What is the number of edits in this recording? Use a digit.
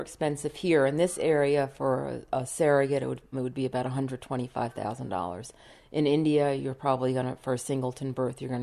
1